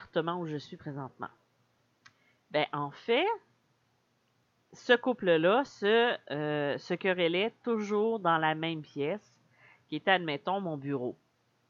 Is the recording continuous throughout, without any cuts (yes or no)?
yes